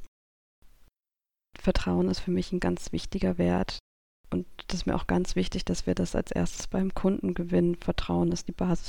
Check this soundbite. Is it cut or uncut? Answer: cut